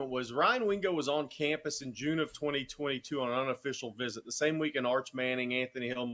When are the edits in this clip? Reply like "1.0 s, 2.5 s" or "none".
none